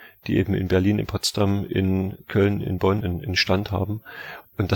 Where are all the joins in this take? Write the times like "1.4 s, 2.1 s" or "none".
3.0 s

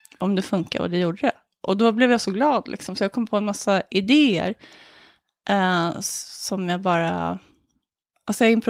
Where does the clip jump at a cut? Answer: none

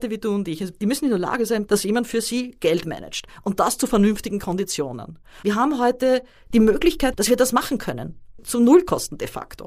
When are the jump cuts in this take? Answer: 1.7 s, 5.4 s, 7.1 s

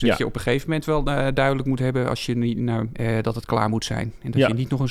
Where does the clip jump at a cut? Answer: 2.9 s

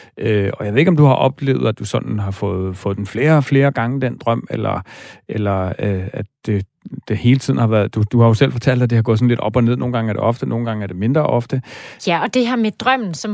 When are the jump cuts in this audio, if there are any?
12.0 s

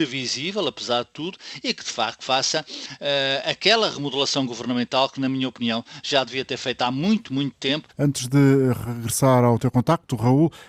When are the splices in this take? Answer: 7.9 s

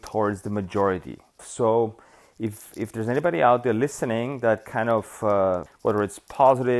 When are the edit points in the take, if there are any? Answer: 1.4 s, 5.7 s

